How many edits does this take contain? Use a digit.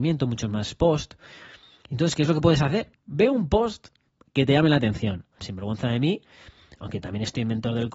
2